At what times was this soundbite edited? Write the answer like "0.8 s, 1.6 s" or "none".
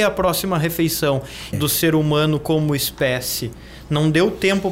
1.5 s